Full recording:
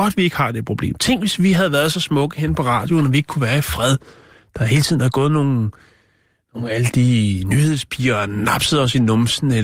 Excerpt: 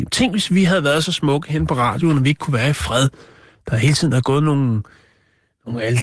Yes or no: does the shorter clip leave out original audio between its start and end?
no